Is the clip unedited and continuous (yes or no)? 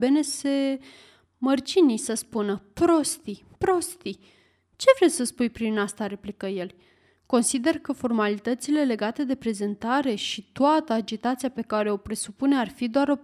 yes